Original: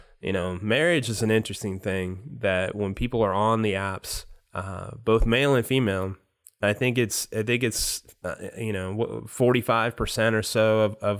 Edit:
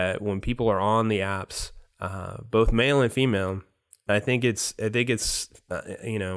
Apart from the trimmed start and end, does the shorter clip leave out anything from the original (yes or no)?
no